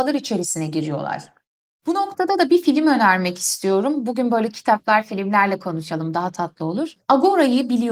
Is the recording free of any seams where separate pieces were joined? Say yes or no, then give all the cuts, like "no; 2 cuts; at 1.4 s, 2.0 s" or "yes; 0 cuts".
yes; 0 cuts